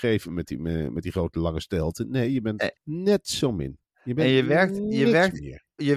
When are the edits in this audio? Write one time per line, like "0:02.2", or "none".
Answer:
0:02.8